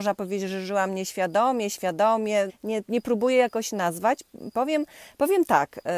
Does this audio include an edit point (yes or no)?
yes